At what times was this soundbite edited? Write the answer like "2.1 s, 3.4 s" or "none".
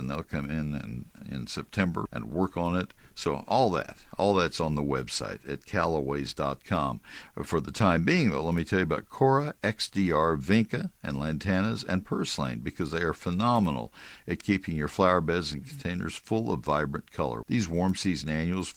2.1 s, 17.4 s